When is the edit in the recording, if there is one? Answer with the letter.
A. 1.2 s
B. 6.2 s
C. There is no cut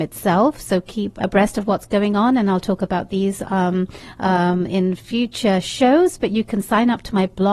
A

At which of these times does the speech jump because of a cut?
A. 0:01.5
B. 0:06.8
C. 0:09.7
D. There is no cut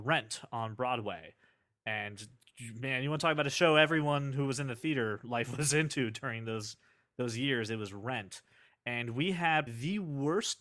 C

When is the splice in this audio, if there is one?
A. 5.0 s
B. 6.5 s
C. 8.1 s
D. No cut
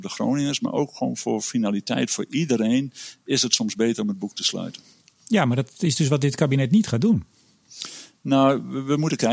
D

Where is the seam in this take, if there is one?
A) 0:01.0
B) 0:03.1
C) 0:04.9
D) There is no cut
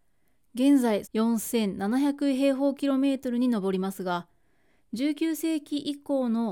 A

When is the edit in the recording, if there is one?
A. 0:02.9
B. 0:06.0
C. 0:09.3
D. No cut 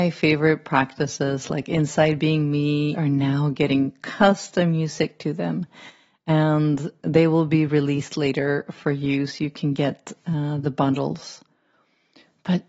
A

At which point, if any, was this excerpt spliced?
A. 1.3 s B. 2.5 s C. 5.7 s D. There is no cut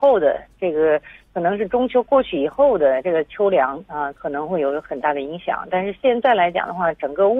D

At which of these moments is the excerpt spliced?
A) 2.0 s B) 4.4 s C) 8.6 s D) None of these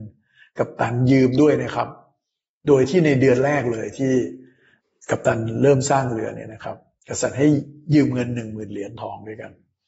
D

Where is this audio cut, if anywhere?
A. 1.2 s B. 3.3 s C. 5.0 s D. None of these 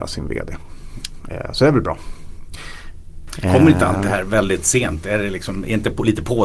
B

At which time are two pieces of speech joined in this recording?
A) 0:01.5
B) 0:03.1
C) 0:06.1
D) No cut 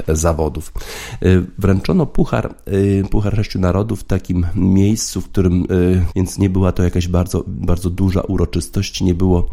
C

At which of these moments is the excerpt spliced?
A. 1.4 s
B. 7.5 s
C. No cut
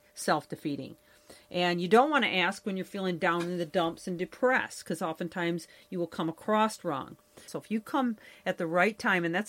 B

